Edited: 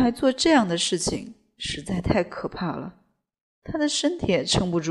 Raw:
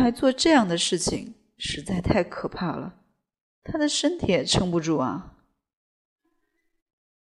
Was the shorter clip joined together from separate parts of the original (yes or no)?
no